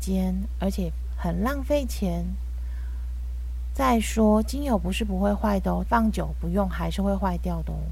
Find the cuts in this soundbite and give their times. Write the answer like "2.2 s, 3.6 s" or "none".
5.9 s